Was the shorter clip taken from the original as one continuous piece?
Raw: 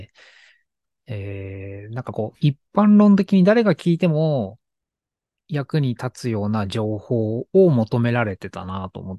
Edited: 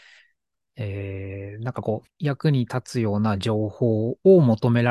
no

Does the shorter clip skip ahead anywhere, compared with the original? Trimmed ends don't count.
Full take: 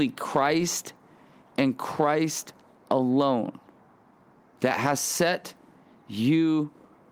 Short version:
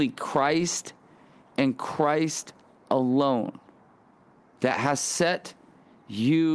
no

